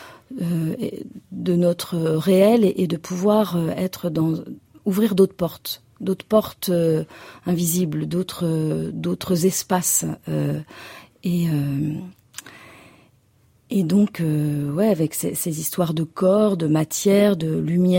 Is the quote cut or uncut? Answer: cut